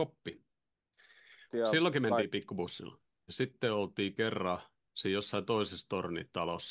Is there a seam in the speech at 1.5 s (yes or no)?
yes